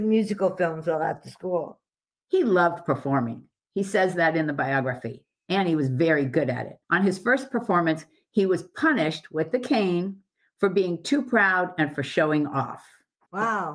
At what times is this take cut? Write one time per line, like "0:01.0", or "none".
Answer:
0:06.8